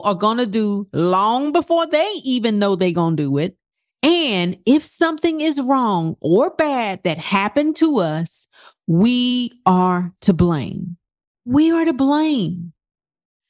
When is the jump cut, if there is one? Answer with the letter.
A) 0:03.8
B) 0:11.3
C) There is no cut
B